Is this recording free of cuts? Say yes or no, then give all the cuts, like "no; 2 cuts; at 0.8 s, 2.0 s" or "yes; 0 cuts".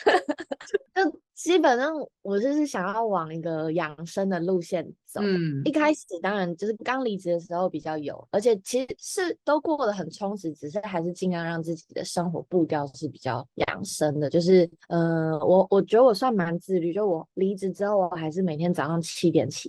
no; 1 cut; at 6.8 s